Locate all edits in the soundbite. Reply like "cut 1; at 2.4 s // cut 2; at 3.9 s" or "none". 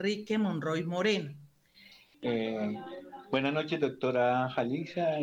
cut 1; at 2.1 s